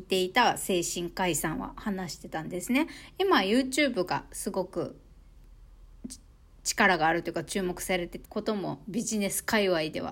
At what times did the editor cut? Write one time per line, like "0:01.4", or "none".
0:08.3